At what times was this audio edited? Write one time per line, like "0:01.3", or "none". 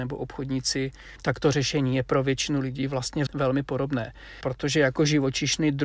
0:03.3